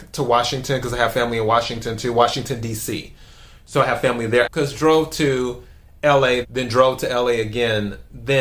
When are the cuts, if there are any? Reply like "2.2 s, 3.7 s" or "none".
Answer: 4.4 s, 6.4 s

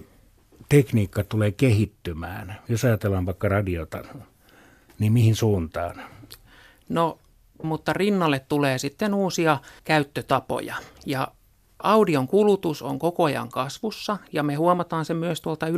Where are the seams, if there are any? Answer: 7.6 s, 9.8 s

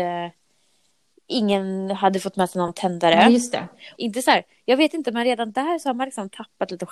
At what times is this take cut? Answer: 3.9 s

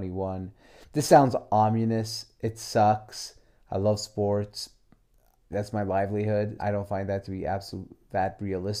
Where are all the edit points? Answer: 5.5 s, 6.6 s

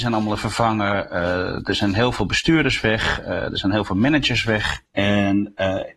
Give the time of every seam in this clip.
4.9 s

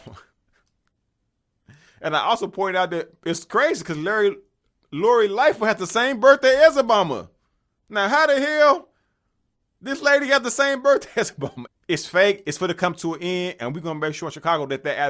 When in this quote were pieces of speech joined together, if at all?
11.7 s

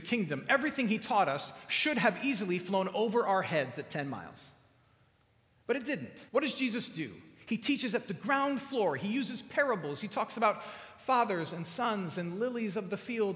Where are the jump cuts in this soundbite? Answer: 6.3 s

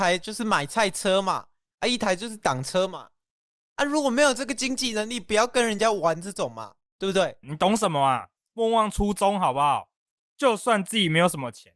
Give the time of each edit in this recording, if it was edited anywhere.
7.4 s, 10.1 s

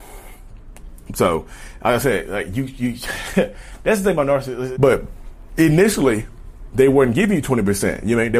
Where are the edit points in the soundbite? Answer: 4.8 s

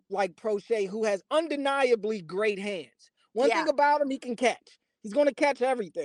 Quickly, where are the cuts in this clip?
none

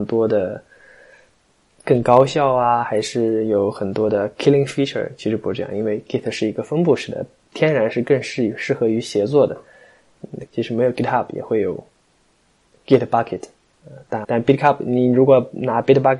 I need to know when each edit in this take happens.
10.5 s, 14.2 s

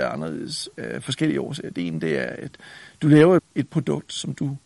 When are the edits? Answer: 3.4 s

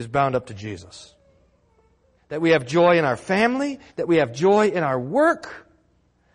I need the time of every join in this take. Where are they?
2.2 s, 3.9 s

